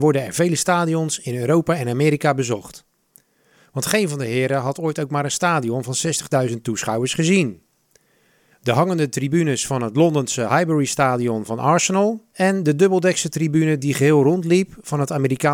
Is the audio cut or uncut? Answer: cut